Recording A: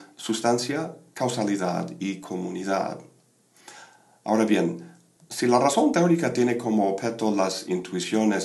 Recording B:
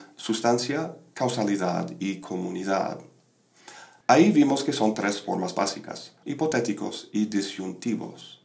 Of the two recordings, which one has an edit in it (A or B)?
B